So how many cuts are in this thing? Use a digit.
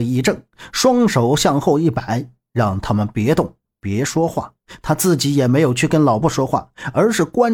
1